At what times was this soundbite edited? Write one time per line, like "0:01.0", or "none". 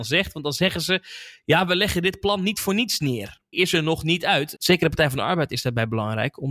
0:03.5
0:04.6